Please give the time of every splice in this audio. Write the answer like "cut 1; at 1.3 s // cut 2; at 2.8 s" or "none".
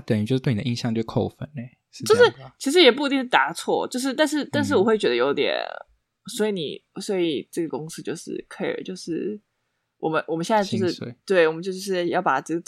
none